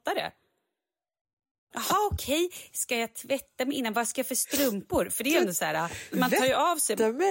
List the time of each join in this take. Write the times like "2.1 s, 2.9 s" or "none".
1.7 s, 6.1 s